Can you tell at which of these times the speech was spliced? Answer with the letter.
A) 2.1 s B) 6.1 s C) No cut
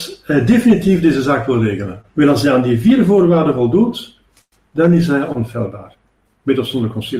A